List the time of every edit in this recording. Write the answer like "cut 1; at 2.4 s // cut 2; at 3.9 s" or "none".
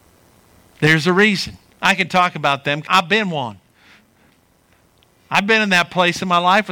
cut 1; at 1.7 s // cut 2; at 2.9 s